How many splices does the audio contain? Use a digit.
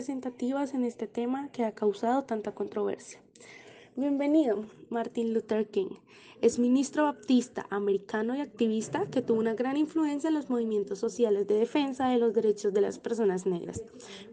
0